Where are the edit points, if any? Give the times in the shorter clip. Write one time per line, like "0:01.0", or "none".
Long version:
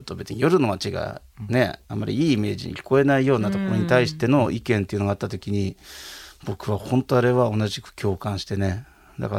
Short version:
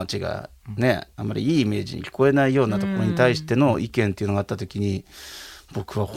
none